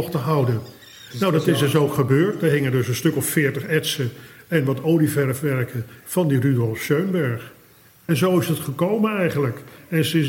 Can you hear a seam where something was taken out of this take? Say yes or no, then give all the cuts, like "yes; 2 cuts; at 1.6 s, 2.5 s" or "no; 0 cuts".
no; 0 cuts